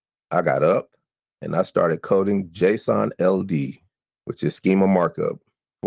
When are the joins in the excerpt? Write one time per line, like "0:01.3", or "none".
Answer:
none